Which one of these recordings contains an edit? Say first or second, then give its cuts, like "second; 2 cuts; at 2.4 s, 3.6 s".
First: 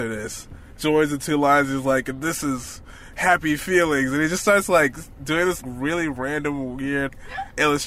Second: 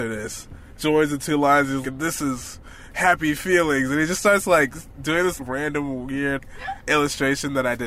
second; 2 cuts; at 1.8 s, 5.4 s